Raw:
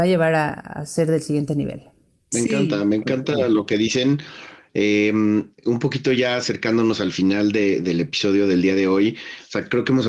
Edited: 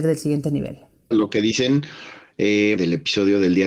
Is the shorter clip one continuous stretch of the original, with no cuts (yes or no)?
no